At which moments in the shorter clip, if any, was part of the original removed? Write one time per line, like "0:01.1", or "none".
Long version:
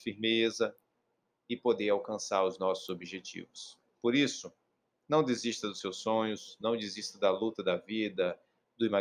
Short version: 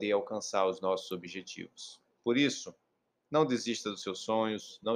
none

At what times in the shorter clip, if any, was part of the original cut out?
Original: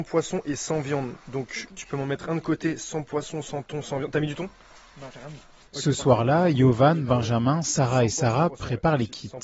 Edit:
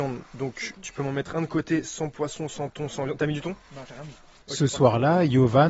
0:03.6

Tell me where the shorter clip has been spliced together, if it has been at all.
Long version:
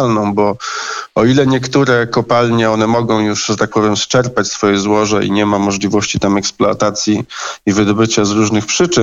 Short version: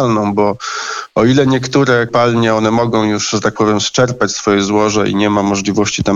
0:02.1

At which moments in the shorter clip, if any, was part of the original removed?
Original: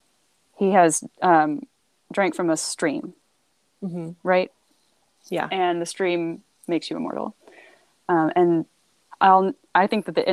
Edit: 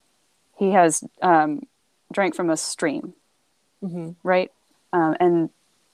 0:04.7

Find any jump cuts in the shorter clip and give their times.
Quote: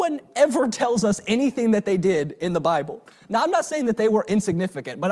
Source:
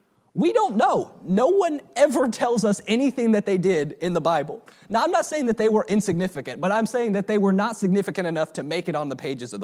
none

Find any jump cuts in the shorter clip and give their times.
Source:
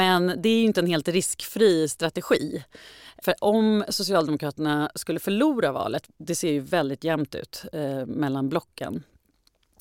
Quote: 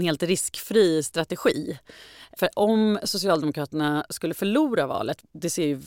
none

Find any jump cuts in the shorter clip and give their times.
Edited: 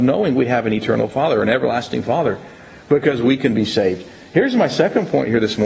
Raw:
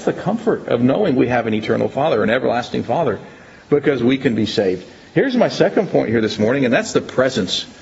none

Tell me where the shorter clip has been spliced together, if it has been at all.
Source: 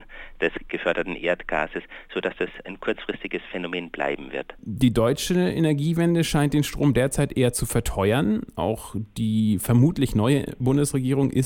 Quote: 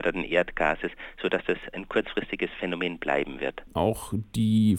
0:03.7

